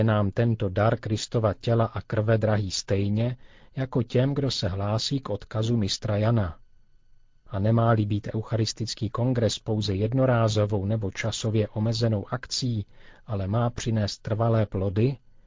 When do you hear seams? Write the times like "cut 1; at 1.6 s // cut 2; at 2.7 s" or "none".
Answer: none